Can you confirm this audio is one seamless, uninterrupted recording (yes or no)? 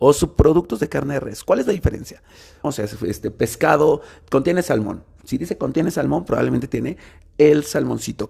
no